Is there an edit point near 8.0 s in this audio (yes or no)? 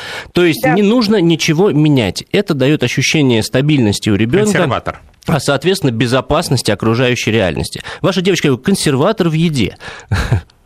no